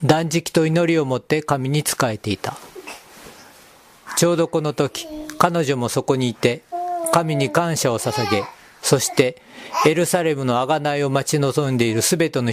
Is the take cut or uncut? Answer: uncut